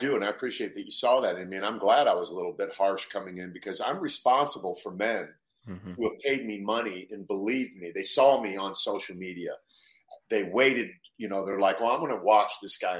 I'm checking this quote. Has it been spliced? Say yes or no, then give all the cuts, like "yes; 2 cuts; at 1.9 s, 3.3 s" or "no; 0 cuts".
no; 0 cuts